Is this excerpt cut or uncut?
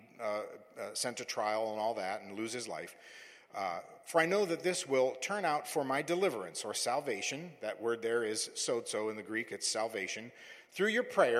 uncut